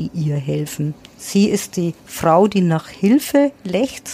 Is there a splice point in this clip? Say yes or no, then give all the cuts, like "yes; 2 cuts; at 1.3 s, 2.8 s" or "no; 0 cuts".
yes; 1 cut; at 1.0 s